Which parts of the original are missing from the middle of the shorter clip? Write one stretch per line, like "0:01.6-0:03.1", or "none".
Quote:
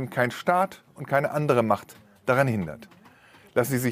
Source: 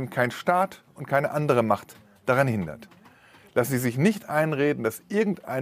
none